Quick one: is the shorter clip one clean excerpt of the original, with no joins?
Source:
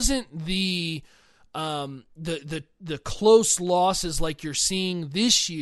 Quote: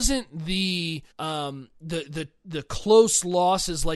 no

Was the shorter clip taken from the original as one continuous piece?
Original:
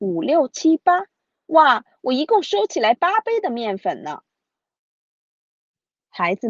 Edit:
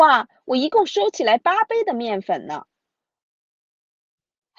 yes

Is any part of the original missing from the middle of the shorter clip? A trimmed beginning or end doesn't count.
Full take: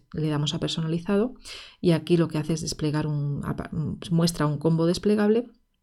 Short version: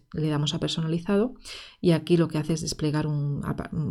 no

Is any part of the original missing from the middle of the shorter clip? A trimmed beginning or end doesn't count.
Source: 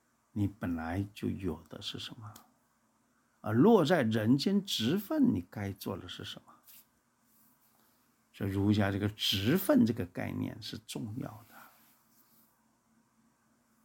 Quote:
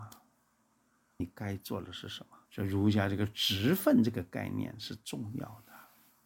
yes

